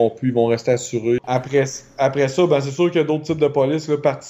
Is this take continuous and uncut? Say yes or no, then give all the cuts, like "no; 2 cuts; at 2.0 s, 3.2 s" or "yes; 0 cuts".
no; 1 cut; at 1.2 s